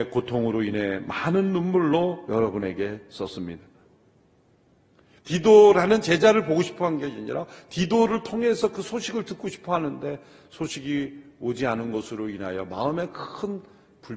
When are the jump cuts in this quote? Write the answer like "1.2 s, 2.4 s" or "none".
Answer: 3.8 s